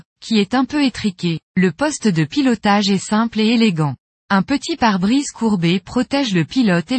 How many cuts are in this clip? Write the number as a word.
one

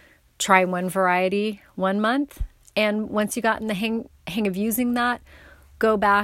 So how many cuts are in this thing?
zero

